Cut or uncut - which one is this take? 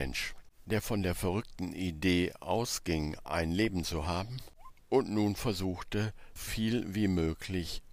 cut